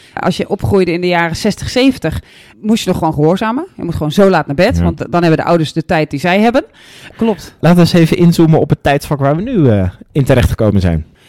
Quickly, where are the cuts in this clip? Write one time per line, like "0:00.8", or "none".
0:05.0
0:07.1

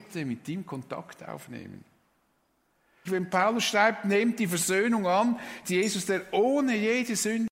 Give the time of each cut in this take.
0:03.1
0:05.6

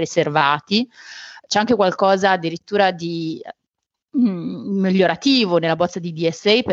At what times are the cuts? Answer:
none

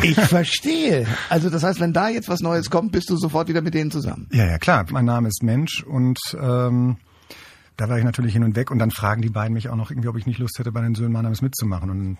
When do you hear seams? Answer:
0:04.9

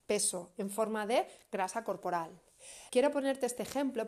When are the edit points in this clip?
0:02.9

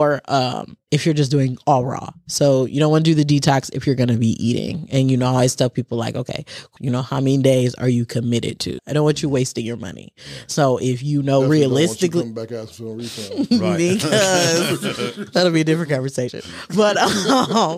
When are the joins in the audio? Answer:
0:06.8
0:08.8

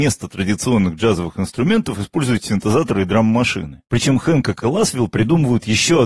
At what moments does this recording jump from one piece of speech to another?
0:03.8

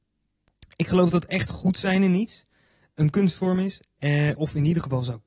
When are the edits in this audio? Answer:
none

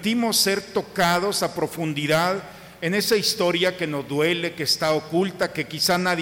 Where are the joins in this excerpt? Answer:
none

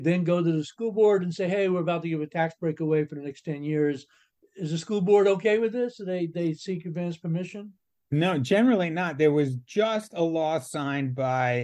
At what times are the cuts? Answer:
none

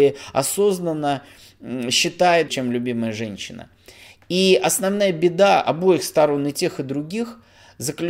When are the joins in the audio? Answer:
0:02.5

